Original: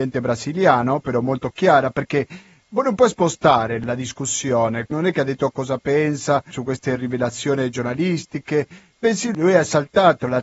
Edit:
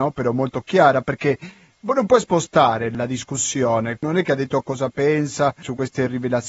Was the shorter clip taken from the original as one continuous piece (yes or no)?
yes